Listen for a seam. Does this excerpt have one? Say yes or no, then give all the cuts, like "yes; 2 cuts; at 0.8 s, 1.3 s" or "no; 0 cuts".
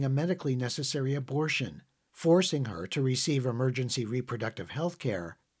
no; 0 cuts